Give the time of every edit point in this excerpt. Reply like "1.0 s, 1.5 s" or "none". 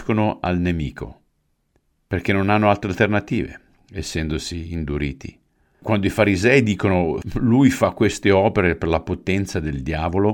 5.7 s